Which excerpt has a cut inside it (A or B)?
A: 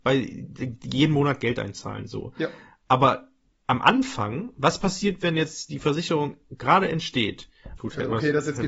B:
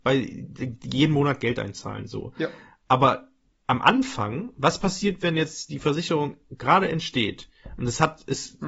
A